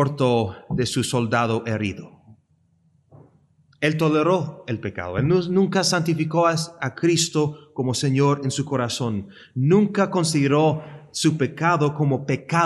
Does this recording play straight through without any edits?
yes; 0 cuts

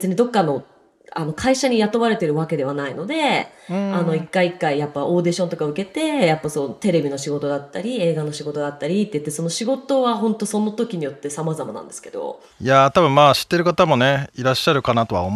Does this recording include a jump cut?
yes; 1 cut; at 12.5 s

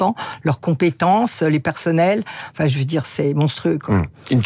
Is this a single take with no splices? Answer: yes; 0 cuts

